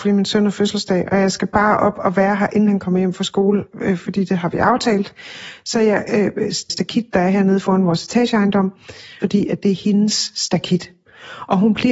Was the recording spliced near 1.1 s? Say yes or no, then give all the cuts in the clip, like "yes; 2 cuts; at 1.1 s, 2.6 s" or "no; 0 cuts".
no; 2 cuts; at 6.7 s, 9.2 s